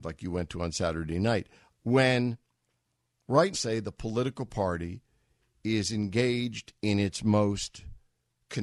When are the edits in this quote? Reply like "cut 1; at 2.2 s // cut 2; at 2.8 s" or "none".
cut 1; at 1.7 s // cut 2; at 3.5 s